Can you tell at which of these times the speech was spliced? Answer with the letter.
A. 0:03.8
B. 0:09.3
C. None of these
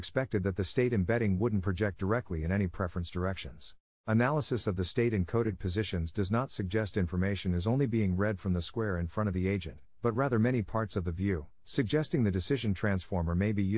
A